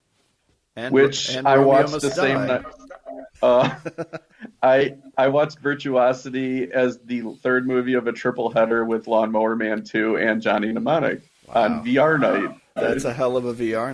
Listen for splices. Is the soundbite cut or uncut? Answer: cut